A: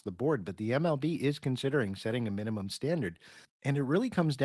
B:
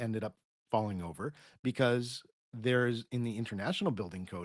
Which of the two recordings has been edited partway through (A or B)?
A